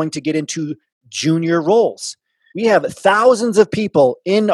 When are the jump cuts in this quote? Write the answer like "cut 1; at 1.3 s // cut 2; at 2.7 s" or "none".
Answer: cut 1; at 2.5 s